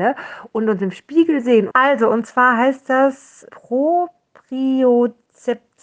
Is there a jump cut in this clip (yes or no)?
yes